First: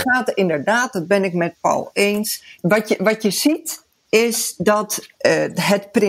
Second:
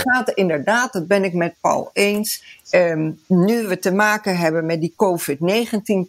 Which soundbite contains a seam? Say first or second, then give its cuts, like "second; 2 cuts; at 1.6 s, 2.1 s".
first; 1 cut; at 2.5 s